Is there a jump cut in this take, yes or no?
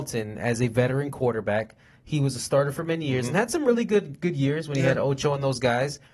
no